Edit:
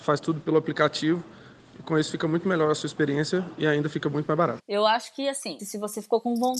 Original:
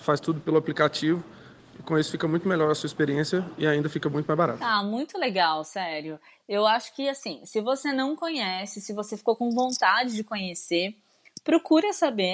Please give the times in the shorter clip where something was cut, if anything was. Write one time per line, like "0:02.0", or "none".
0:04.6
0:05.6

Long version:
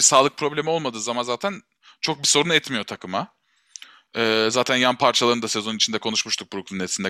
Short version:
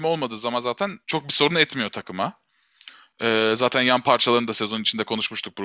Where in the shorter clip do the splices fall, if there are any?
0:01.0

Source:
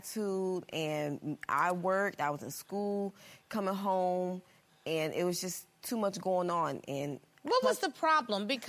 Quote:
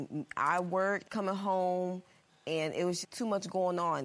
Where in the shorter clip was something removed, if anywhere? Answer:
0:01.0
0:03.0

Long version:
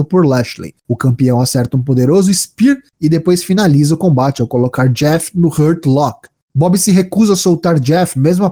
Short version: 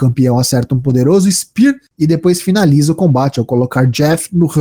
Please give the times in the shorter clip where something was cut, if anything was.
none

